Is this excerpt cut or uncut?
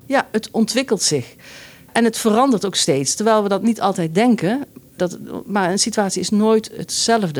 uncut